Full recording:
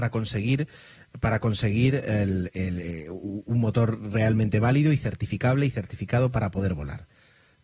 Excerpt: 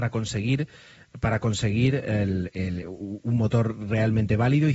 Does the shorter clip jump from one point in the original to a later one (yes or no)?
yes